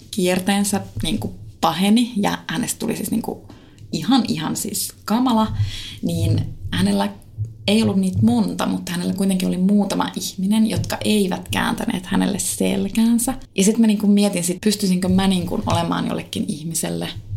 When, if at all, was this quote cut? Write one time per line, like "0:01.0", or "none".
0:13.4
0:14.6